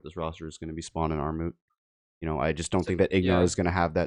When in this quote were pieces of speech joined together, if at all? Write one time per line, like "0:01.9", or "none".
none